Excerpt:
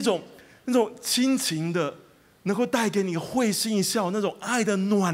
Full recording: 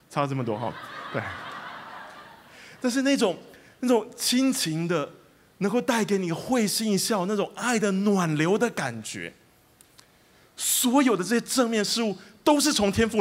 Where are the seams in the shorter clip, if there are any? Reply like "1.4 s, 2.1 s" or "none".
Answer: none